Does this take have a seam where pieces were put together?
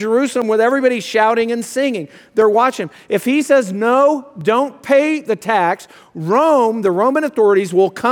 no; 0 cuts

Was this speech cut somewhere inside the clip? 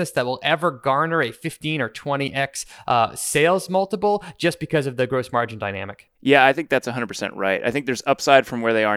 yes; 1 cut; at 6.1 s

